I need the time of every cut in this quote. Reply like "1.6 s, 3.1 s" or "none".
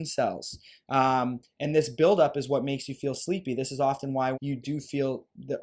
4.3 s